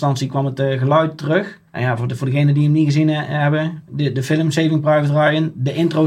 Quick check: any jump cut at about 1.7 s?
yes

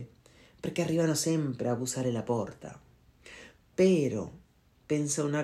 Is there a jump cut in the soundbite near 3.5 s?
no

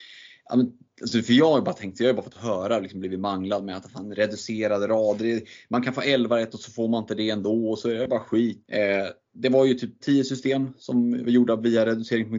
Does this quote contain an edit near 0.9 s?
no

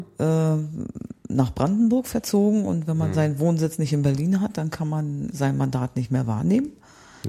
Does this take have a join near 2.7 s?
no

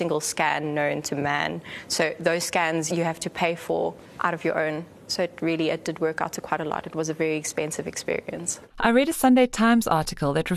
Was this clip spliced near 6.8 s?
no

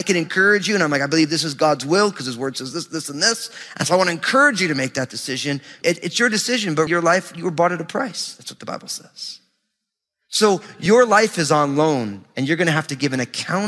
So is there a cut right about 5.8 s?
yes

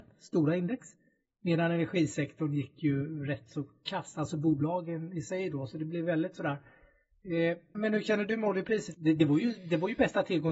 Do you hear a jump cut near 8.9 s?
yes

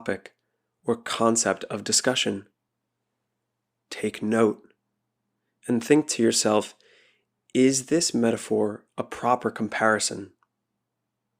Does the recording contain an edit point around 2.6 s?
no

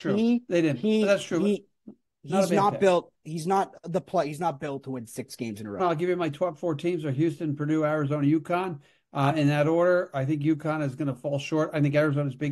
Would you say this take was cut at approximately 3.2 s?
no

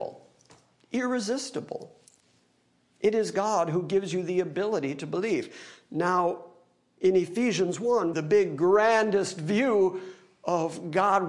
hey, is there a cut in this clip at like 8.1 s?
yes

